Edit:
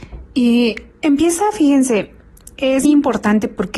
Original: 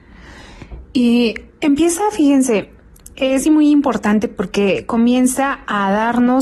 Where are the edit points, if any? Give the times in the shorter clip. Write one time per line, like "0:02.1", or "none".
0:02.8